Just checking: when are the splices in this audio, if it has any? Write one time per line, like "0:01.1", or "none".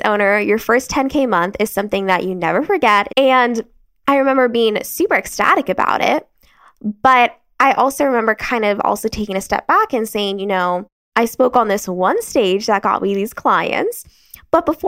0:03.1